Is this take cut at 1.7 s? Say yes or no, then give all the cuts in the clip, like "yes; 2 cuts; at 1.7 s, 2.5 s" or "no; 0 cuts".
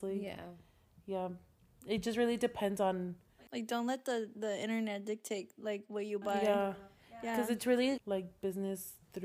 no; 1 cut; at 8.0 s